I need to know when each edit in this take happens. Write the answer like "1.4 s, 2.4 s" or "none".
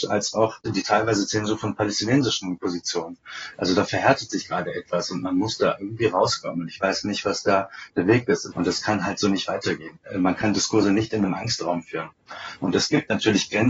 8.5 s